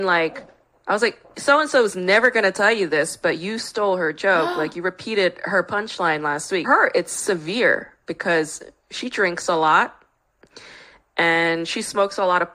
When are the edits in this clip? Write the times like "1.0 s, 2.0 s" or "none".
6.6 s